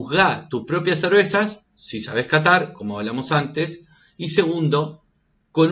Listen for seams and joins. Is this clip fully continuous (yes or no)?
no